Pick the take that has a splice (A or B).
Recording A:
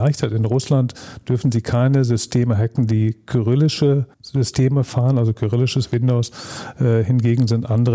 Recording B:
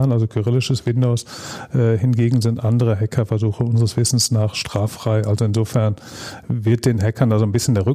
A